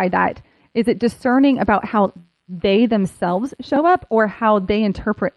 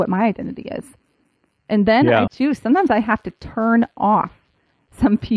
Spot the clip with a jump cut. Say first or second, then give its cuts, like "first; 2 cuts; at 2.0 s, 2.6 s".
second; 1 cut; at 2.3 s